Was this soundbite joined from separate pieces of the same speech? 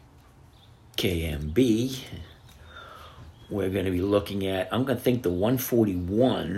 no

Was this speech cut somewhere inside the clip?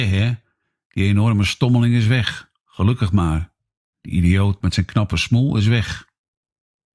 no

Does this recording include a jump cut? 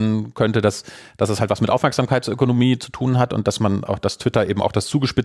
no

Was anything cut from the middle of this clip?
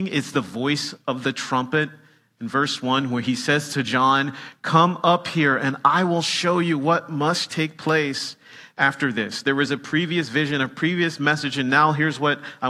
no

